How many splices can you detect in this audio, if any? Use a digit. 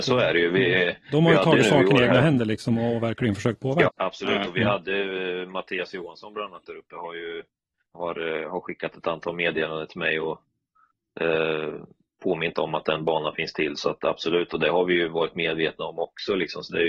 2